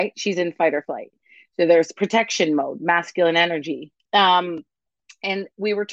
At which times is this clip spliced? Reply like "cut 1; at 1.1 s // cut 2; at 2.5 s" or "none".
cut 1; at 4.1 s